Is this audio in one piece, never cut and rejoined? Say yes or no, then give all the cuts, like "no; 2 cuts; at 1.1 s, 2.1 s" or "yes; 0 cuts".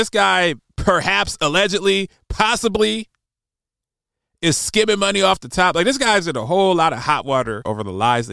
yes; 0 cuts